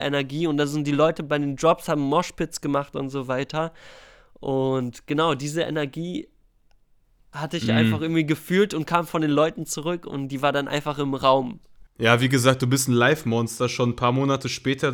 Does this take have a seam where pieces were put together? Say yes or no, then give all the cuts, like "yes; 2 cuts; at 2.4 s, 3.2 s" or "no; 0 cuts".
no; 0 cuts